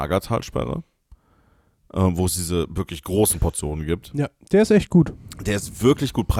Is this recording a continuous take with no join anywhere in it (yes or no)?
yes